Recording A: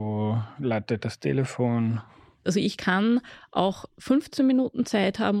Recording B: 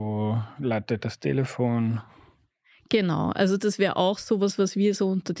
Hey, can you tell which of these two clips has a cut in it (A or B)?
A